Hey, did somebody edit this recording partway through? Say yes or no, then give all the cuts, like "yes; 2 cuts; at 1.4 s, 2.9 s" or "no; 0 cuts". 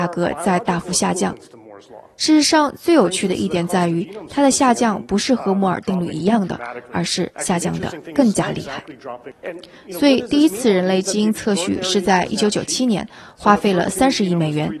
no; 0 cuts